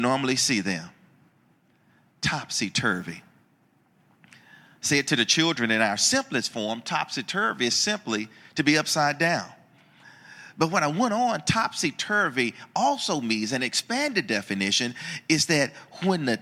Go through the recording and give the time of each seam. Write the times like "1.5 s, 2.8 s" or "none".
none

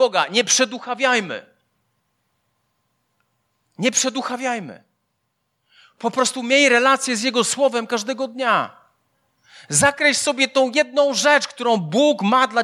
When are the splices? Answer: none

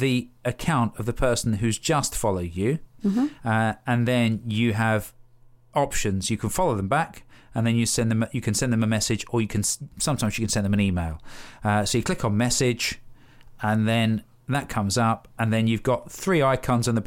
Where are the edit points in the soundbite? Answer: none

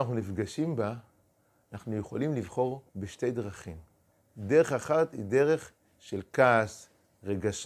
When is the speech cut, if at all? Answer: 2.9 s

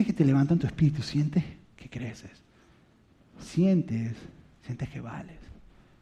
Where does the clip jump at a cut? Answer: none

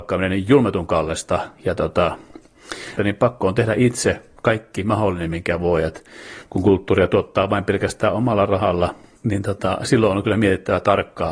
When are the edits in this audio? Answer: 3.0 s

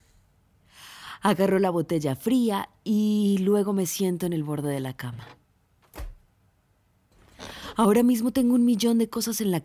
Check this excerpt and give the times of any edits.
none

